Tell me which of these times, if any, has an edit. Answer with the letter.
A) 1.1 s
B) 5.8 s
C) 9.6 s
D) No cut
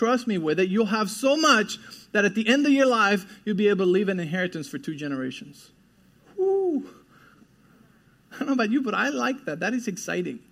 D